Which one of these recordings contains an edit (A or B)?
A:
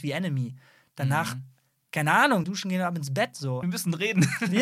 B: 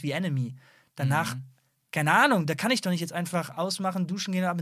A